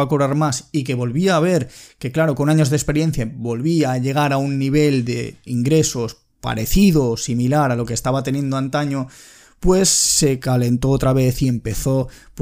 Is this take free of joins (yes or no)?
yes